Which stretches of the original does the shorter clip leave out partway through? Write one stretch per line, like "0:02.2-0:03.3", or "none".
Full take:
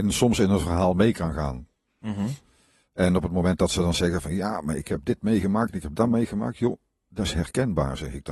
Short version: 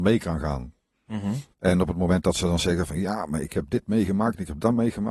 0:02.4-0:02.9